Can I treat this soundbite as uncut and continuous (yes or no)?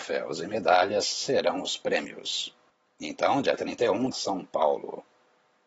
no